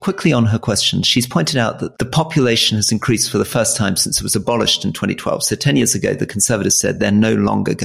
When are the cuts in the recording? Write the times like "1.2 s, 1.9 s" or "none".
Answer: none